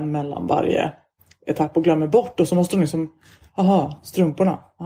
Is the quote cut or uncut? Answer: uncut